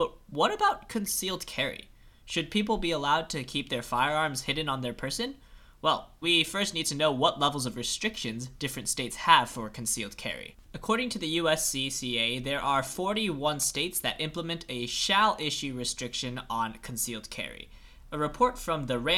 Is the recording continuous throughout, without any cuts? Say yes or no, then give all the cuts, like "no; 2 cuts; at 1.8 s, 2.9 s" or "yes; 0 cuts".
no; 2 cuts; at 6.2 s, 18.0 s